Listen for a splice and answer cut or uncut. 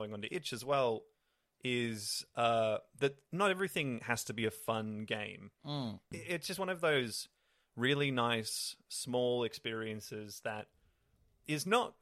cut